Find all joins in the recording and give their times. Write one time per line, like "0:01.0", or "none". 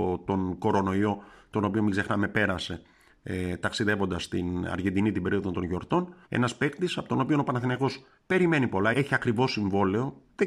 0:06.3
0:08.9